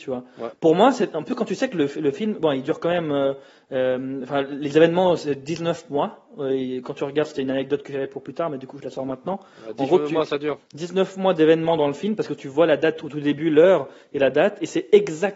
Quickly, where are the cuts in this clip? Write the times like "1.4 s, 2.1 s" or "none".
none

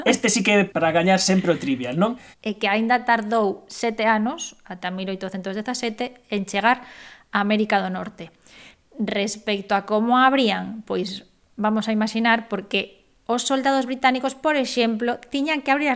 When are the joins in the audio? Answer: 2.3 s

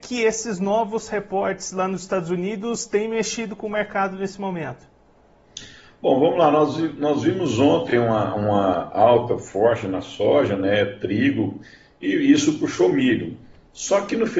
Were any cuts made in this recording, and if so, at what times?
none

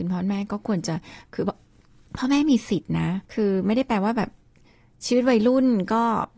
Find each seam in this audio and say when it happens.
3.2 s

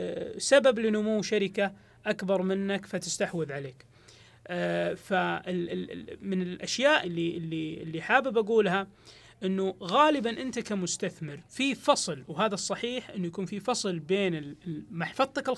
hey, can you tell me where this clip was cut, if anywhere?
7.0 s, 11.5 s

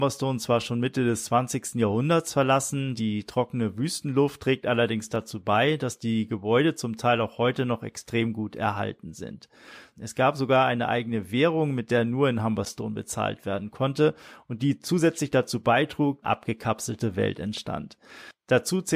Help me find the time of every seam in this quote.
9.9 s, 16.2 s

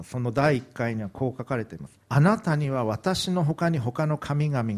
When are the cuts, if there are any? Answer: 2.0 s

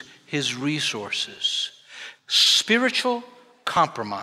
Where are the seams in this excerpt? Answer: 2.2 s

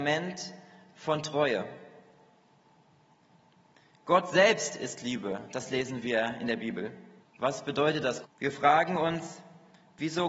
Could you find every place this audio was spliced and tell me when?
7.2 s, 8.2 s

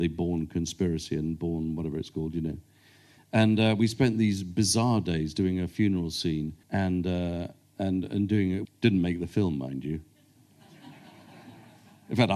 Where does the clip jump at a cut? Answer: 6.6 s, 8.6 s

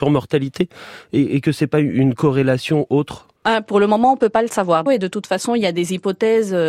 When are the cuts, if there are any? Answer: 3.4 s, 4.9 s

